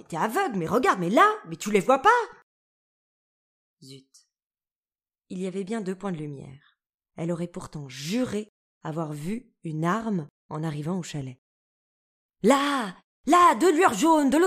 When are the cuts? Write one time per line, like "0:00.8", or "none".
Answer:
0:07.1
0:12.3

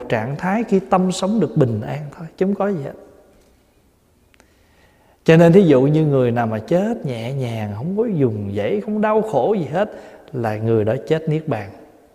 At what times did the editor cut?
0:08.8

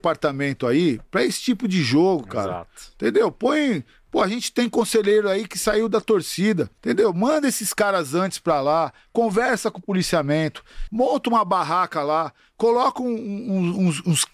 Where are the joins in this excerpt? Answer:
0:06.8
0:10.9

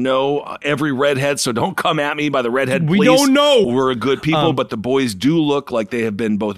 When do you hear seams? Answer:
0:03.6

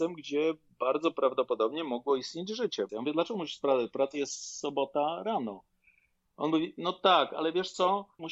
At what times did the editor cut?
0:02.9

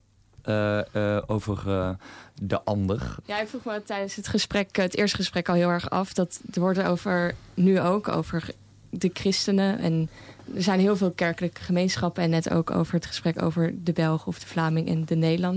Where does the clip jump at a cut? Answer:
0:03.2

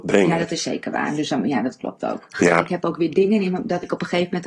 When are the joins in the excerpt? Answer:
0:02.3

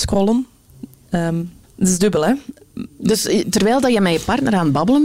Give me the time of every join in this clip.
0:01.6

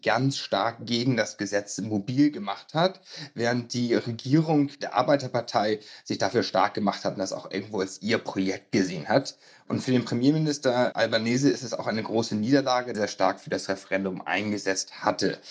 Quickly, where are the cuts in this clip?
0:10.9
0:12.9

